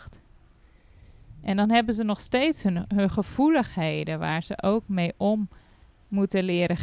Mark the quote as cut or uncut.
uncut